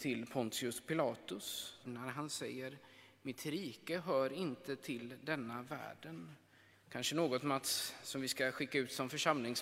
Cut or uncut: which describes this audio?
cut